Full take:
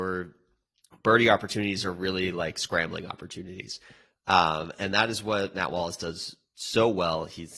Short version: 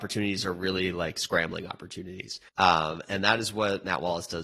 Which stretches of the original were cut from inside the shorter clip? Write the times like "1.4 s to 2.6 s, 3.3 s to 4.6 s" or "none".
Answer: 3.9 s to 4.2 s